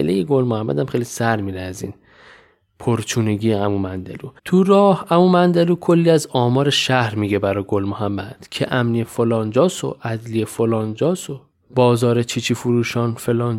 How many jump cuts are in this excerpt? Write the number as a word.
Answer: one